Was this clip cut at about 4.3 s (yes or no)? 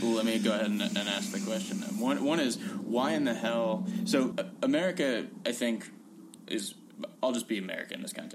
yes